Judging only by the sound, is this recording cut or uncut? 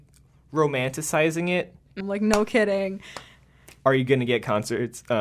cut